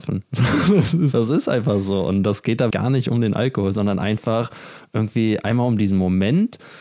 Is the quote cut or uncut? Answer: cut